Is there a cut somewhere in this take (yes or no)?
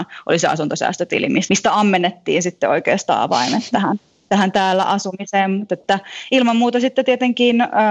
yes